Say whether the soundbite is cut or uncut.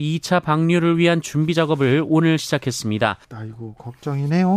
cut